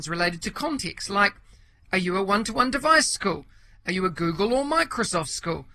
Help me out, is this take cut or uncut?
uncut